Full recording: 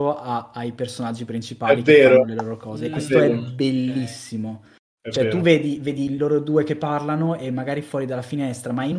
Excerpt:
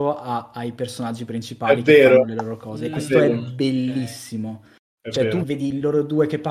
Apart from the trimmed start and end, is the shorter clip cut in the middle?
yes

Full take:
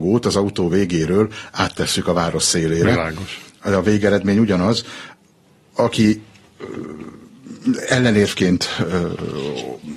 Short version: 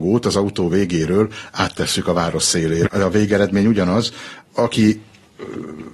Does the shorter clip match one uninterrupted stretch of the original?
no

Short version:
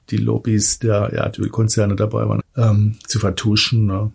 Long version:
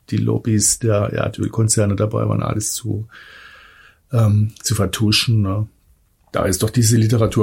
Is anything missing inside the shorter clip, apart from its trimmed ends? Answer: yes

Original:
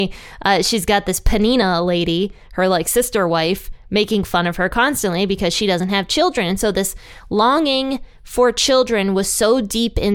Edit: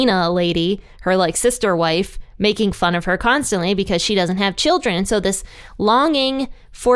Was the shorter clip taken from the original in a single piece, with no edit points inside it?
yes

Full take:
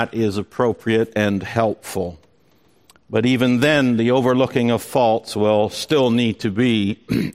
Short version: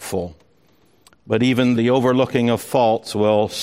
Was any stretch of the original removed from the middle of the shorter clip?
yes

